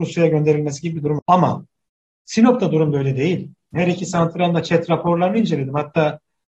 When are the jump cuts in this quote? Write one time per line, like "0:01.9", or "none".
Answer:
0:01.2
0:03.7